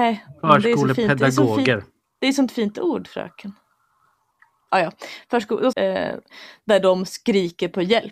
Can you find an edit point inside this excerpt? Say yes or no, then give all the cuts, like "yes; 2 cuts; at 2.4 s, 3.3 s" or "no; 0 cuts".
yes; 1 cut; at 5.7 s